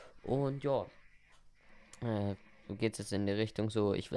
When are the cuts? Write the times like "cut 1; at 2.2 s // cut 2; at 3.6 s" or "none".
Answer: none